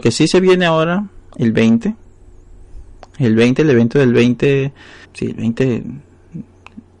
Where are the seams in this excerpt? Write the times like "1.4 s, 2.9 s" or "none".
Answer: 5.0 s

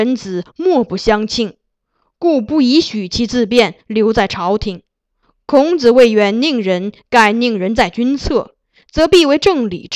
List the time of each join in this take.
none

